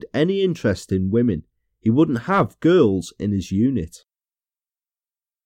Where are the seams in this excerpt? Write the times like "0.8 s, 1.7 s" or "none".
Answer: none